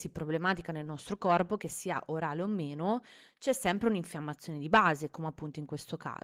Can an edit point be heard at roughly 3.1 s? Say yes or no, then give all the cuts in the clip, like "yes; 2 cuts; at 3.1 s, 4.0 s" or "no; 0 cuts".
no; 0 cuts